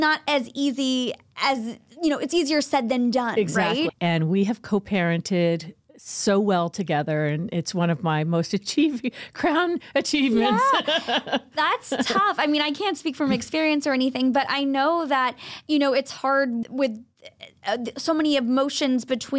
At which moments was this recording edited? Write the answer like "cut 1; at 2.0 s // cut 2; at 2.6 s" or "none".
cut 1; at 3.9 s // cut 2; at 16.6 s